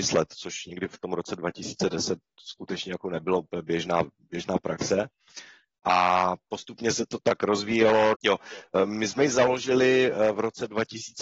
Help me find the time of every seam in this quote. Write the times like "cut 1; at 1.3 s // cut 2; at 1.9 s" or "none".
cut 1; at 8.1 s